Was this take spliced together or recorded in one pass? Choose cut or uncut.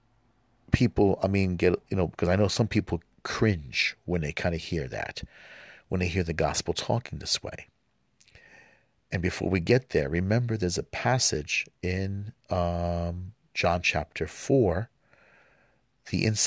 uncut